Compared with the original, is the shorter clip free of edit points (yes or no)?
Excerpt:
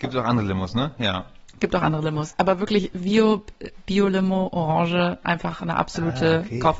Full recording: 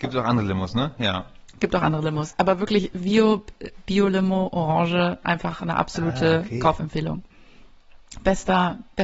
yes